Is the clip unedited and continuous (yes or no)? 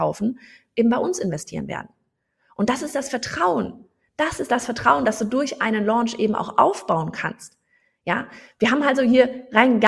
yes